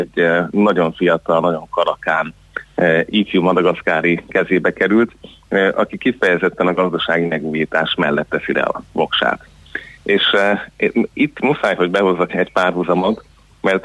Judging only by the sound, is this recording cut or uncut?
cut